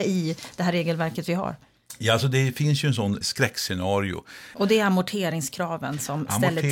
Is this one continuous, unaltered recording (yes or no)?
no